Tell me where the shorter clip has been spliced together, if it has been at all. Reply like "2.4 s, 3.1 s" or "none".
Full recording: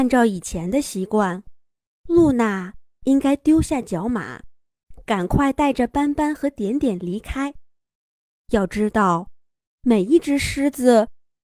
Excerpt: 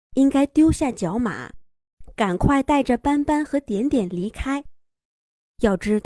none

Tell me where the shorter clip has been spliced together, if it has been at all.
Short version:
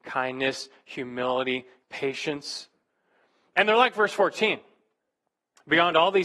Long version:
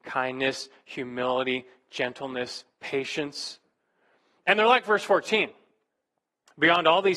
1.8 s

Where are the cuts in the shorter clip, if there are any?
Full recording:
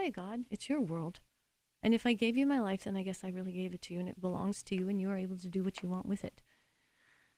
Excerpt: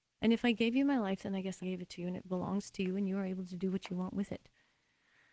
1.6 s

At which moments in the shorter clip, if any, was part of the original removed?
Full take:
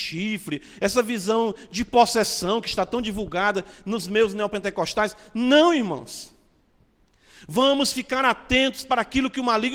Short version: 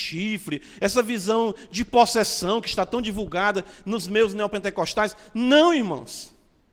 none

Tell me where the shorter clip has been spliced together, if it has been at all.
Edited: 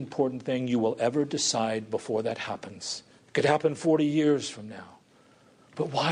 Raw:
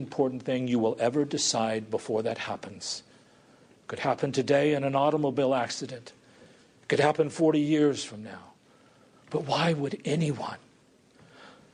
3.2 s

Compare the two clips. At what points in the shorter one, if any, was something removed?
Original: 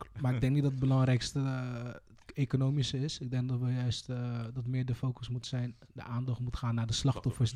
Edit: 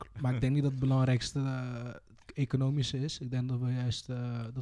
none

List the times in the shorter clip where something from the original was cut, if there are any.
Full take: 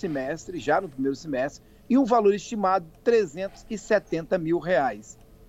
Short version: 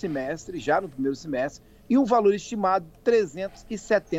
none

